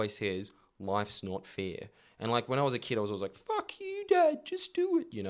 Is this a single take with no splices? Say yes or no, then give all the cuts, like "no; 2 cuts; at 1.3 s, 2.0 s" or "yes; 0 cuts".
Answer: yes; 0 cuts